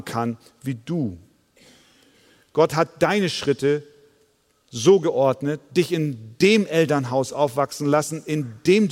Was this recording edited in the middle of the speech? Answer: no; 0 cuts

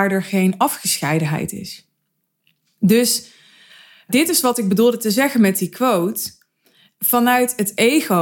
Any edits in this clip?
no; 0 cuts

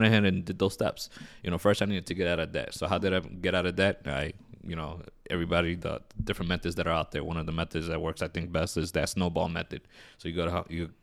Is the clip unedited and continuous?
yes; 0 cuts

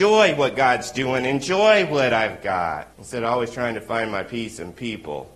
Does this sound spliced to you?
yes; 1 cut; at 2.9 s

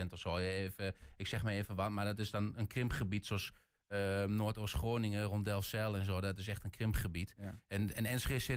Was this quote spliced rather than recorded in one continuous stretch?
no; 0 cuts

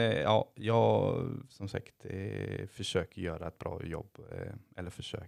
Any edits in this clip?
no; 0 cuts

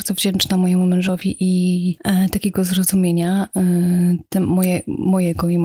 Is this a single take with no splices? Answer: yes; 0 cuts

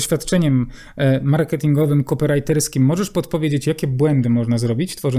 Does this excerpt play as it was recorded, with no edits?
yes; 0 cuts

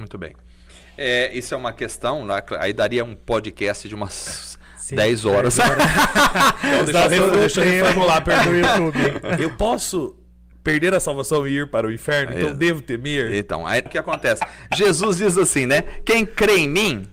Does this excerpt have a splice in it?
yes; 1 cut; at 13.9 s

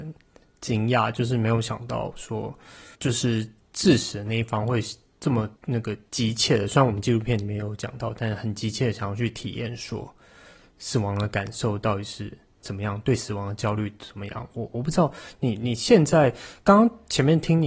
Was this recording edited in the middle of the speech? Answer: yes; 2 cuts; at 2.9 s, 5.6 s

